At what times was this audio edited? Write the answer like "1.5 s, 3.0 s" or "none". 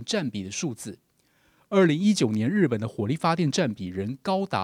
1.6 s